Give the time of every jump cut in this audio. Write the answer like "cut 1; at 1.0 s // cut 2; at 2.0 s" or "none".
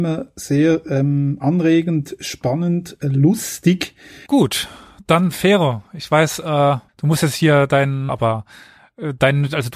cut 1; at 4.3 s // cut 2; at 6.9 s // cut 3; at 8.1 s